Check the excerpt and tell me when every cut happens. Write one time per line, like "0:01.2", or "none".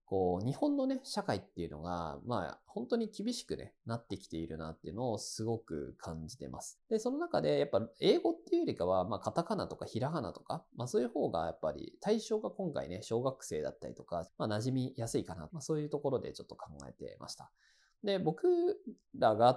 0:06.8
0:14.3
0:15.5